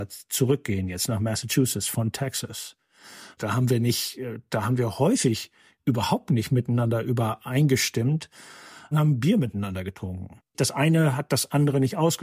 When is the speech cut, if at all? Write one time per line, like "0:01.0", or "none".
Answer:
0:03.4
0:08.9